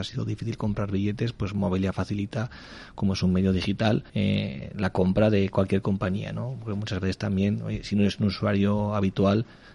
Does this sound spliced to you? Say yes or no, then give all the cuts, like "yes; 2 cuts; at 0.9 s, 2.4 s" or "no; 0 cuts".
yes; 1 cut; at 4.1 s